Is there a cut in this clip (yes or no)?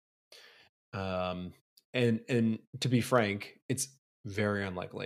no